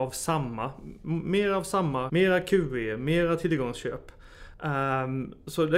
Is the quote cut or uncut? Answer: cut